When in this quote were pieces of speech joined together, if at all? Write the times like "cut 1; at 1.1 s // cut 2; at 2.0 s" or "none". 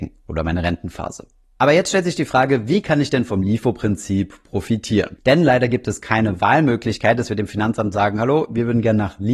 none